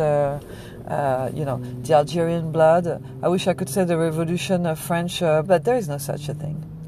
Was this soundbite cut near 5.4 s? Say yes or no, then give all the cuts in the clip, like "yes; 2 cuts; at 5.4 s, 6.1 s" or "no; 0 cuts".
yes; 1 cut; at 5.4 s